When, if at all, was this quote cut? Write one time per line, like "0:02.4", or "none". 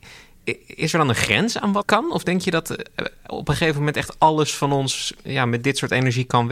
0:01.8